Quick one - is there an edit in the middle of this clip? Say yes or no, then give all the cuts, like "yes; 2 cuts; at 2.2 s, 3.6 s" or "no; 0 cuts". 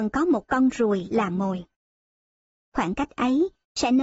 yes; 1 cut; at 2.7 s